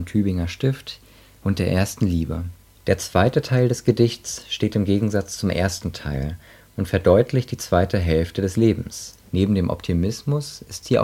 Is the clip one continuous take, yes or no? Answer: no